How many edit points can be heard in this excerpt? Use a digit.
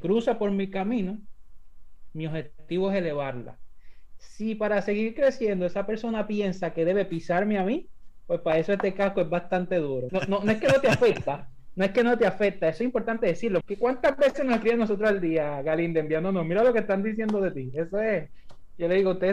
2